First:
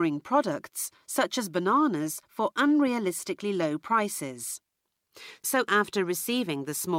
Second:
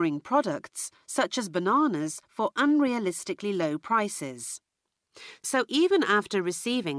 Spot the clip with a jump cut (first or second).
first